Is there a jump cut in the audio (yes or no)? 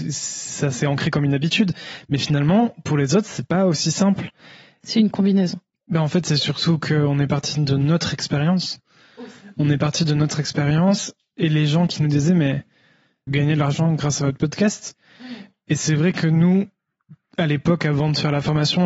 yes